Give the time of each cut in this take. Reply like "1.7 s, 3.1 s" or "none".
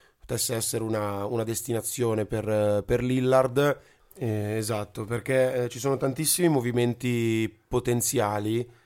4.0 s